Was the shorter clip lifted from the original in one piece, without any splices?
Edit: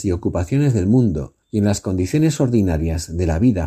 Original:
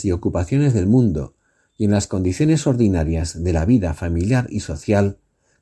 no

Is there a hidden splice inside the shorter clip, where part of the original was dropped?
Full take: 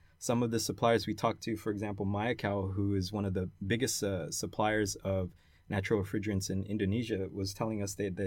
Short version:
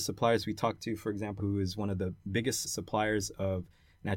yes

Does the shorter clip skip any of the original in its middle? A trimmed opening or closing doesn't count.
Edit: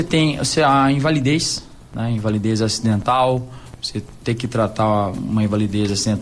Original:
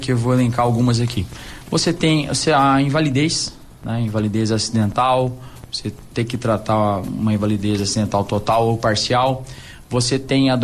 no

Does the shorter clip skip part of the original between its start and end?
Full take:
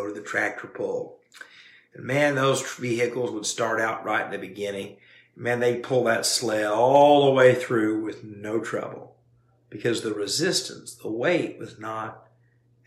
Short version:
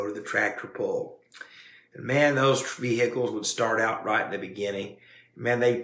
no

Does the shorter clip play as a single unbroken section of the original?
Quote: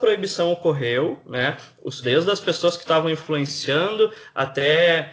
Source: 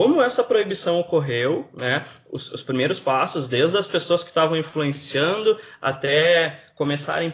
no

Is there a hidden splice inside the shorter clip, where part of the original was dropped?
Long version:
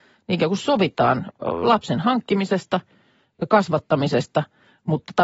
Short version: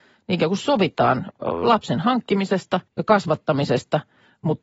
yes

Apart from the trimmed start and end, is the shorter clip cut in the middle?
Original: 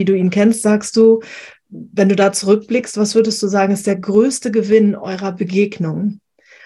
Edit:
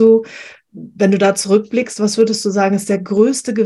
no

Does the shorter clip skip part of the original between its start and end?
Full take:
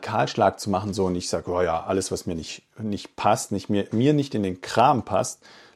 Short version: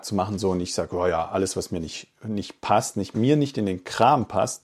yes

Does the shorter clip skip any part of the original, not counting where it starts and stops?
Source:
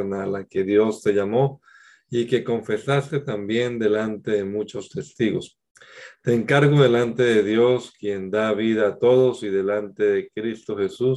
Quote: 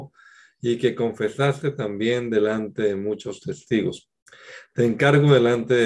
no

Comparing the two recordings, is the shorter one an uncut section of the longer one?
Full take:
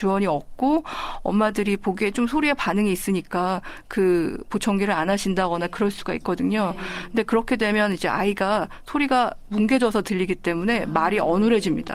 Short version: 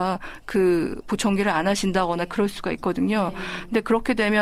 yes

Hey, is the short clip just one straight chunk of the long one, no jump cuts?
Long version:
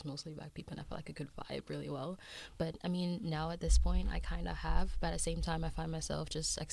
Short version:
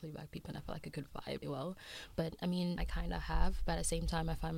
no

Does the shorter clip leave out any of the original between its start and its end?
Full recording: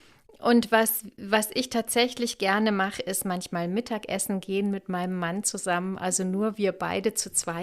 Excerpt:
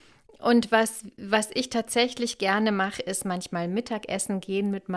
no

